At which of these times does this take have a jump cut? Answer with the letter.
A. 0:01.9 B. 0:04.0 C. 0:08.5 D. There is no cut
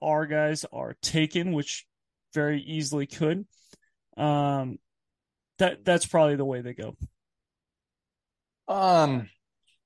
C